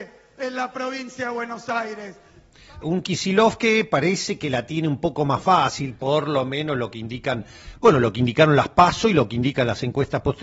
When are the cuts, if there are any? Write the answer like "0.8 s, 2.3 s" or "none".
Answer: 2.8 s